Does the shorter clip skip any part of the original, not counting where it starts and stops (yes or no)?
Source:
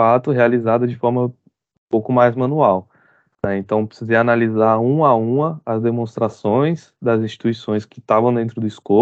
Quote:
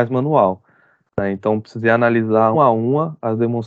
yes